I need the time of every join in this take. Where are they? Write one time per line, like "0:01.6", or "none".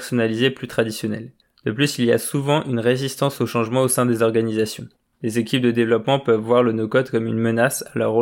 none